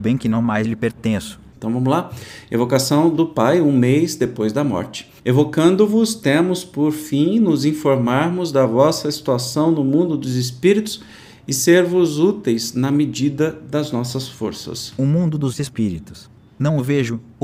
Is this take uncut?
no; 2 cuts; at 1.5 s, 5.2 s

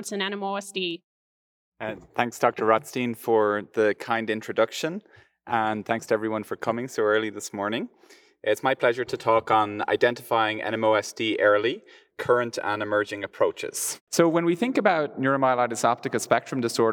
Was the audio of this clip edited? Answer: no; 0 cuts

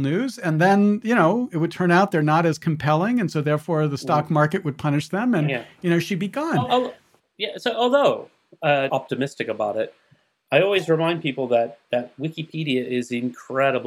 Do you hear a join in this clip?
yes; 1 cut; at 8.9 s

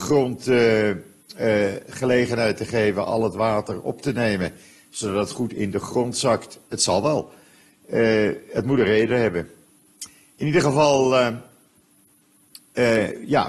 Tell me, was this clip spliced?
no; 0 cuts

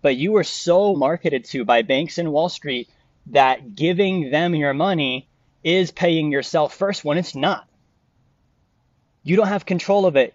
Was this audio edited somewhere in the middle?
yes; 2 cuts; at 0.9 s, 7.3 s

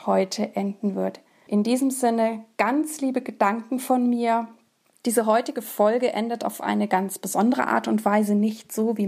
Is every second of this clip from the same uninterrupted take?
no; 1 cut; at 4.9 s

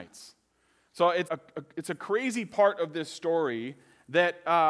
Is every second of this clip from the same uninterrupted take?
no; 1 cut; at 1.2 s

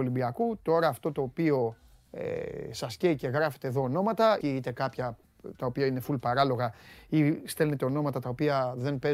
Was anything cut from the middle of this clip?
yes; 1 cut; at 4.4 s

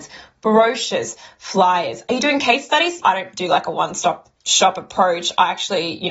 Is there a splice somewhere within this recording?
yes; 2 cuts; at 3.0 s, 4.4 s

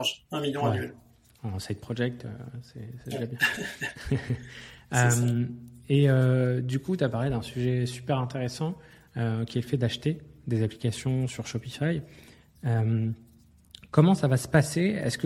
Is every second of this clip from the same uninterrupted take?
yes; 0 cuts

